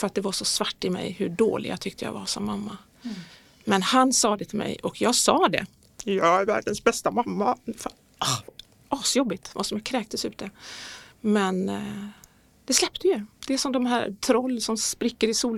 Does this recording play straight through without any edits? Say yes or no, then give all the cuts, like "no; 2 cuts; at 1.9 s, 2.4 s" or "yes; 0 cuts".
no; 1 cut; at 13.4 s